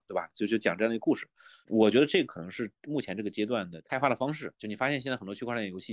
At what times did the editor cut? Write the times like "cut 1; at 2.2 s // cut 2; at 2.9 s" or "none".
none